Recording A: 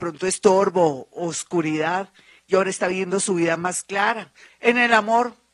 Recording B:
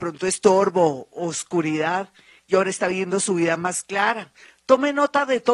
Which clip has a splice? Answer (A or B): A